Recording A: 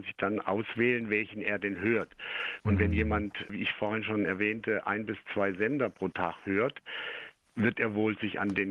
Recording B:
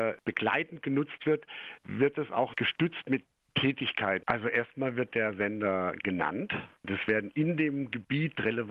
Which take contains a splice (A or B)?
B